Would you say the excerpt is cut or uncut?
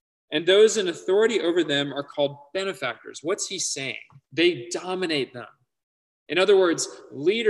cut